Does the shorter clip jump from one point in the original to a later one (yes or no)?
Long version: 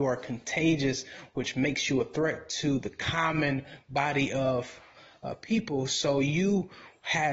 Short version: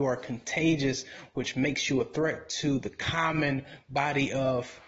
no